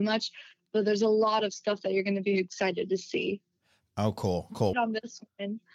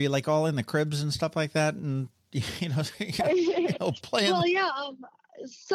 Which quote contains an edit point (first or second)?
first